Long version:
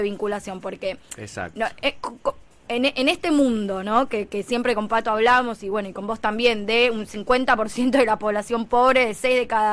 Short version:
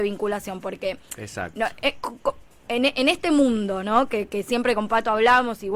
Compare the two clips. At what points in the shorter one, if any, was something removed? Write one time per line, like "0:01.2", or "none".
none